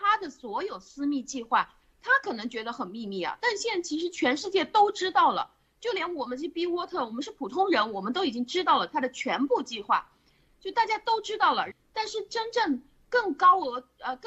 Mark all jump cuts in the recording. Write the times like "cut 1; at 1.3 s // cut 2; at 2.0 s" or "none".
cut 1; at 10.5 s // cut 2; at 11.7 s